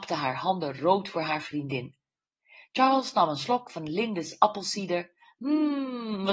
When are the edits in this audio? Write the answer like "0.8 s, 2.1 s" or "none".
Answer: none